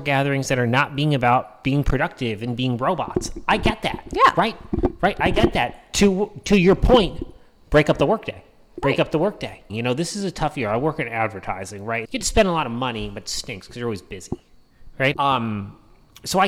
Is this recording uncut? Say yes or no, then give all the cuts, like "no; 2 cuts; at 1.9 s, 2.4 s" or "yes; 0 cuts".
no; 3 cuts; at 9.7 s, 12.0 s, 15.1 s